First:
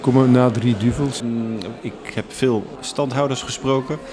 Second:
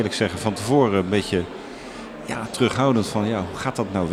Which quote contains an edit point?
first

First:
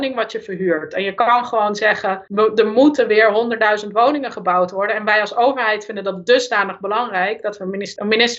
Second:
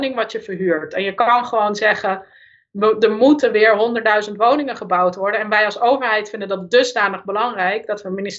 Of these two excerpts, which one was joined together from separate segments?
first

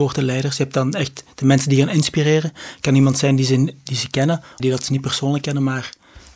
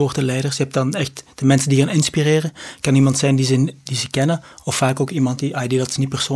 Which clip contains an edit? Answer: first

